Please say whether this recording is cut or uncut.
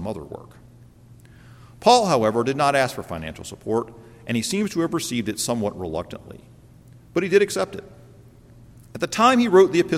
uncut